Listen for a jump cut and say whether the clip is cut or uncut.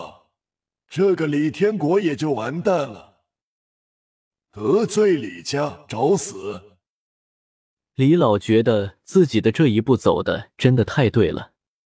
uncut